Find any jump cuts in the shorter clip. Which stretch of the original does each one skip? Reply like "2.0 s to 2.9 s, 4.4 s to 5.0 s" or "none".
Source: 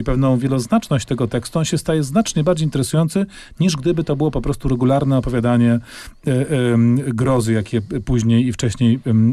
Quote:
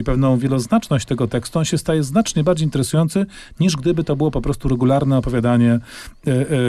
none